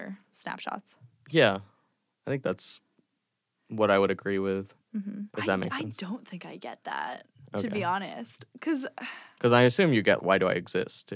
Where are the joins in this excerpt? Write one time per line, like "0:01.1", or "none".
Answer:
0:05.3
0:10.2